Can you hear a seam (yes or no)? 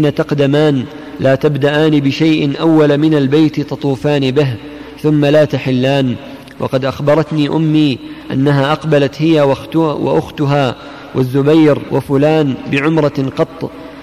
yes